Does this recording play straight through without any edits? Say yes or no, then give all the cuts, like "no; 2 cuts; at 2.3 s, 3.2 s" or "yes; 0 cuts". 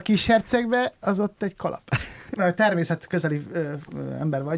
no; 1 cut; at 2.3 s